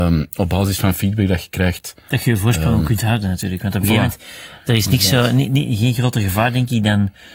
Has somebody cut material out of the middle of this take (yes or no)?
no